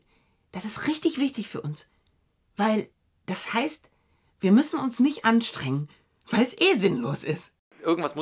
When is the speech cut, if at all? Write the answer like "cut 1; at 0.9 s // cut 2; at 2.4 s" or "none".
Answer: none

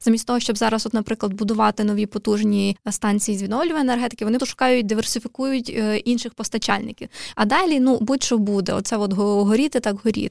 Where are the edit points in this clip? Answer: cut 1; at 4.4 s // cut 2; at 7.3 s

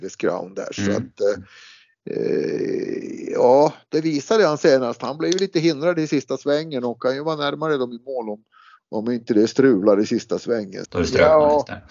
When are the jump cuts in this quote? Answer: cut 1; at 10.8 s

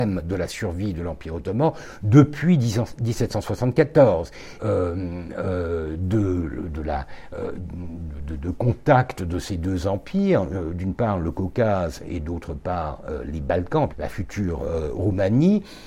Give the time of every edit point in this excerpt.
cut 1; at 4.6 s // cut 2; at 13.9 s

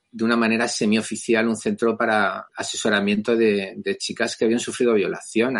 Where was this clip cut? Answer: cut 1; at 2.5 s

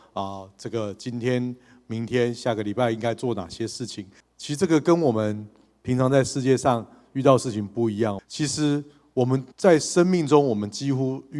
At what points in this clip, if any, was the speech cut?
cut 1; at 4.2 s // cut 2; at 8.2 s // cut 3; at 9.5 s

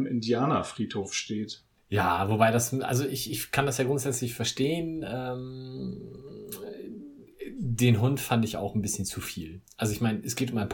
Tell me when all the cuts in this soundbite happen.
cut 1; at 1.8 s

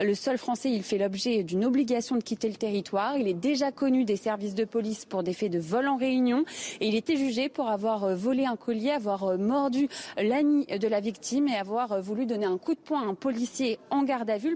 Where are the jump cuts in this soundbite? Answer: none

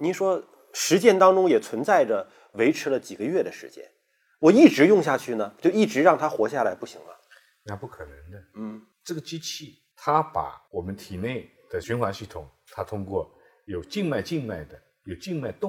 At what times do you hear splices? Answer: none

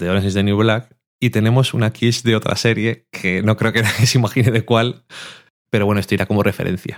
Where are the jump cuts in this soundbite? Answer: none

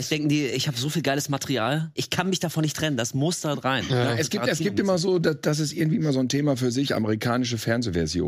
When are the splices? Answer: cut 1; at 2.0 s

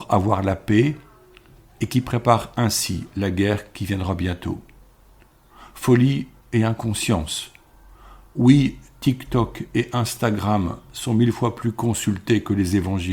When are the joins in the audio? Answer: none

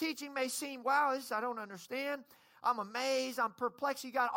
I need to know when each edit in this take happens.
cut 1; at 1.3 s

